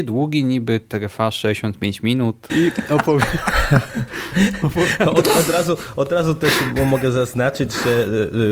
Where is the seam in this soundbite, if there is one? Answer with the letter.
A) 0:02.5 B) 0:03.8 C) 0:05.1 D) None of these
A